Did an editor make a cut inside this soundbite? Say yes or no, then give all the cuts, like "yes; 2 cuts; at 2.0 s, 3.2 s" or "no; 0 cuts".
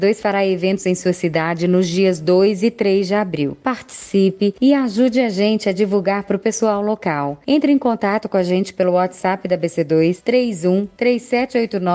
no; 0 cuts